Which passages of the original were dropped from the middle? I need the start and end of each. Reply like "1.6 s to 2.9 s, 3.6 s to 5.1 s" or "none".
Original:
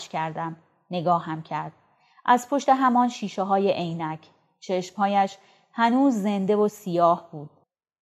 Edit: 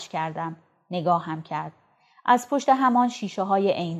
none